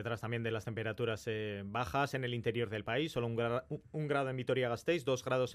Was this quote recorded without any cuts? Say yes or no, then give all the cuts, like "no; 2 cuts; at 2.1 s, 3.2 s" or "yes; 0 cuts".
yes; 0 cuts